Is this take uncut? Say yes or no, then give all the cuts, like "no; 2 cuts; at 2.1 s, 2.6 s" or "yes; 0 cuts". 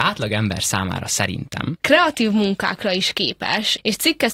no; 1 cut; at 1.8 s